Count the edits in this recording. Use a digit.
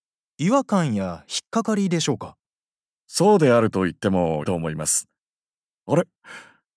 1